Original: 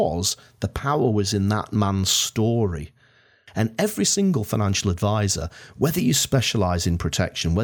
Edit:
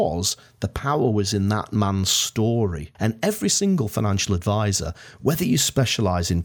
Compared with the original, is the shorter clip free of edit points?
no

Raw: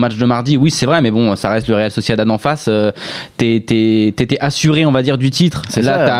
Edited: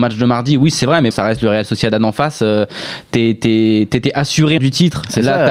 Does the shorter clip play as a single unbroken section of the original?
no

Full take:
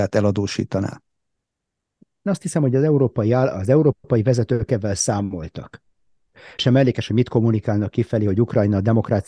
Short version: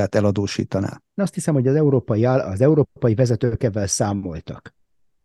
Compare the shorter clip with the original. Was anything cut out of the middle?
yes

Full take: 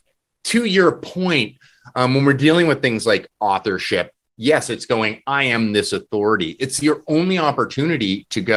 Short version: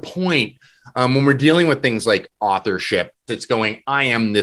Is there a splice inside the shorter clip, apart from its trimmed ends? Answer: yes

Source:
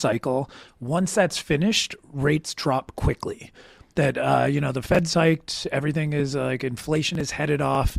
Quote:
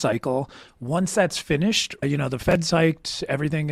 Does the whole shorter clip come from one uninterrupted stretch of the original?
no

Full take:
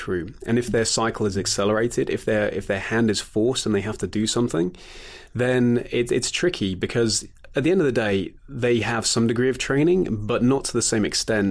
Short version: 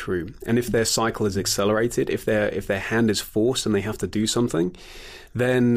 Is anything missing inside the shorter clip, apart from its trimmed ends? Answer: no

